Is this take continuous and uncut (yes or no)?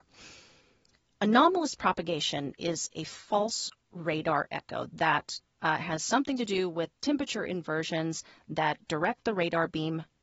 no